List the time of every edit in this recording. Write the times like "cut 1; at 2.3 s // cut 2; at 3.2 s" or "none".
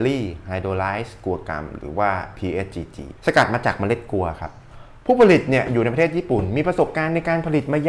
cut 1; at 3.2 s